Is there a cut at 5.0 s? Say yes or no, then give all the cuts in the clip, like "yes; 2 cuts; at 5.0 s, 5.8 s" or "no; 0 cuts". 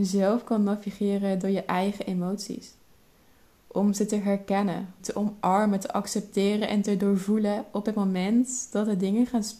yes; 1 cut; at 5.0 s